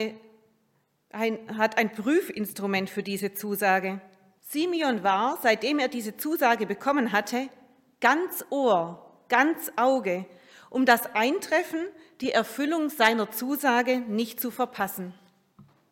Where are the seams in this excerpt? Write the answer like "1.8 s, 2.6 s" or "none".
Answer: 4.4 s